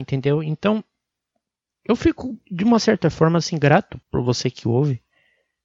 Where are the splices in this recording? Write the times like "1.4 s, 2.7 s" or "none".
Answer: 4.0 s